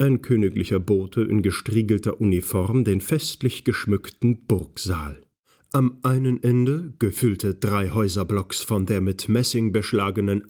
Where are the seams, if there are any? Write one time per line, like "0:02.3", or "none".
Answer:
none